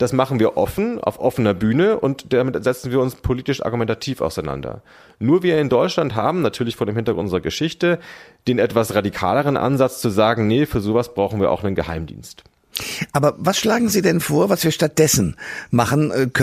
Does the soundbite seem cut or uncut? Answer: uncut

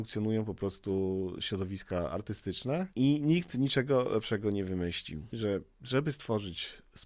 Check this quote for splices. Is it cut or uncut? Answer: uncut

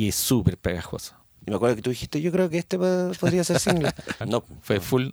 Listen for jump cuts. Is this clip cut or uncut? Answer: cut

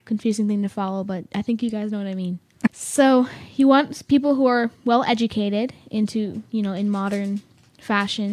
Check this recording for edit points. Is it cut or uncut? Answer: cut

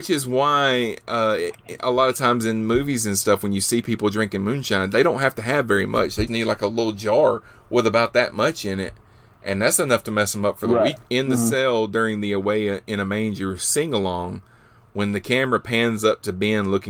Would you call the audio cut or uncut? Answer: cut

